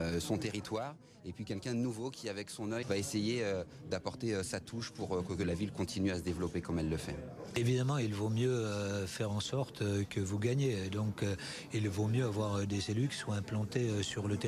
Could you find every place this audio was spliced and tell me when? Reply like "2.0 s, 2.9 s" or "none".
2.8 s